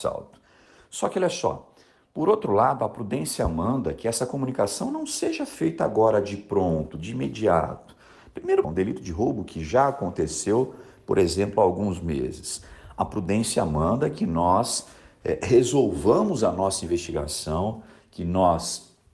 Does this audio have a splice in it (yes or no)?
yes